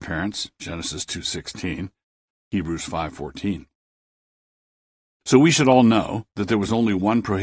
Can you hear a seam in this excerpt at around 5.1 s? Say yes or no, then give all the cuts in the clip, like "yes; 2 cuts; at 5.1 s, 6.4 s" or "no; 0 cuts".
no; 1 cut; at 2.3 s